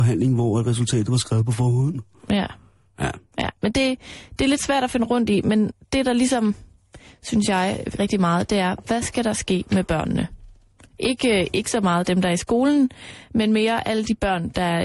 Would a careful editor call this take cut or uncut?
cut